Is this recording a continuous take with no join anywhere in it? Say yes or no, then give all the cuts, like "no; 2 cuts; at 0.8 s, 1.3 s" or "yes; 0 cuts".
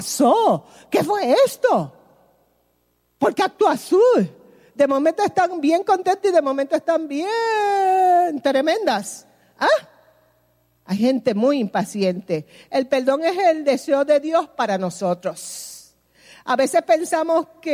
yes; 0 cuts